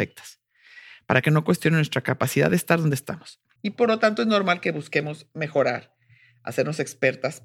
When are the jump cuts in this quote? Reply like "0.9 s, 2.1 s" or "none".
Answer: 3.6 s